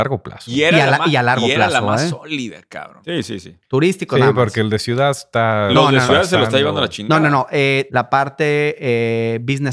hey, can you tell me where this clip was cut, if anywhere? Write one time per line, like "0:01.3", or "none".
0:03.0
0:07.9